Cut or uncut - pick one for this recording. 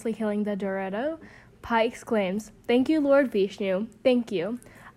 uncut